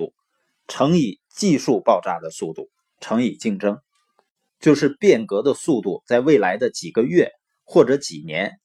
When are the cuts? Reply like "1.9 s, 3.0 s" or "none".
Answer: 4.5 s